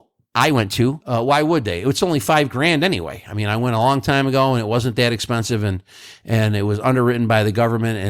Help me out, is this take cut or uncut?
uncut